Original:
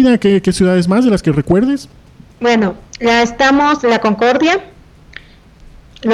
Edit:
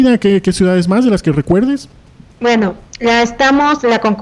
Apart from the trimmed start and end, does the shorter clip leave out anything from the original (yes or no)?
no